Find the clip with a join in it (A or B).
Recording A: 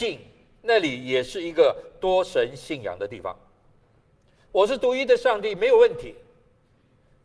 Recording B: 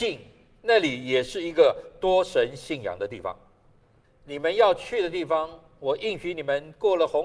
B